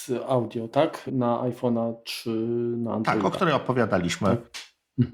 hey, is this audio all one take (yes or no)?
yes